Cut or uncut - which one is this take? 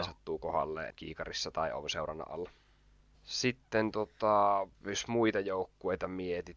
cut